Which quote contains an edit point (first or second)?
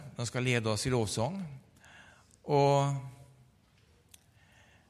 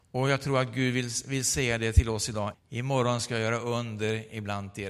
second